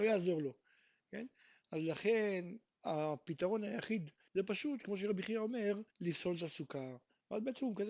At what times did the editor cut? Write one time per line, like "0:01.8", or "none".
0:01.6
0:04.3
0:05.9